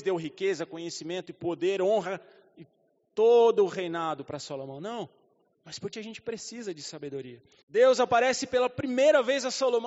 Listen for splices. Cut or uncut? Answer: cut